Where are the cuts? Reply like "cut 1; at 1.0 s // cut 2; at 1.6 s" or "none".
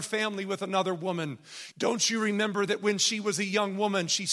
cut 1; at 1.7 s